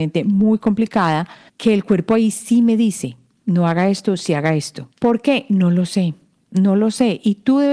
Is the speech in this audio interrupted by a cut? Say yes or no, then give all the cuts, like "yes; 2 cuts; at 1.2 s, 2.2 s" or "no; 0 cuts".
yes; 2 cuts; at 1.5 s, 4.9 s